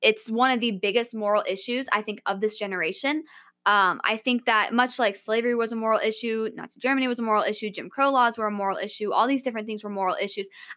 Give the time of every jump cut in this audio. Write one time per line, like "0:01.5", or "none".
none